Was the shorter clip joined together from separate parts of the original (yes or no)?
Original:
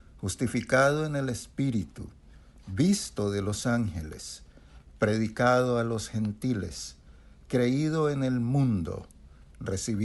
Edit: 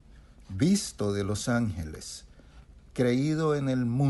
yes